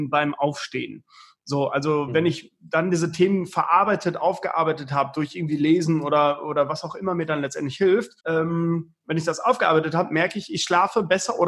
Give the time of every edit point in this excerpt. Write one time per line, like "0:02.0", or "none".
0:08.2